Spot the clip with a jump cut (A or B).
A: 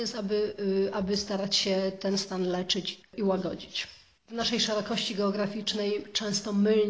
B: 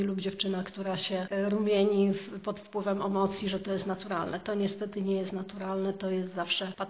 A